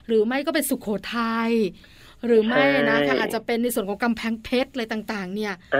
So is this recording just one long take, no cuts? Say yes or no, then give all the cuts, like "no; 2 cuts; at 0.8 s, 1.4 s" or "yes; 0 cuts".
yes; 0 cuts